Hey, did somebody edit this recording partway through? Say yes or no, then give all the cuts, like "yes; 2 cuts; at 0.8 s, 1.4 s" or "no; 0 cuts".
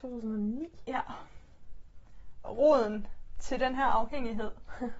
yes; 1 cut; at 2.4 s